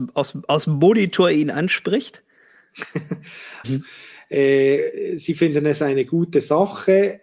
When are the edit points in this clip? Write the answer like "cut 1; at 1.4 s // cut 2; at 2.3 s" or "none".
cut 1; at 3.6 s